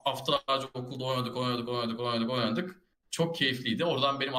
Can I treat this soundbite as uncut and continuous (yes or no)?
yes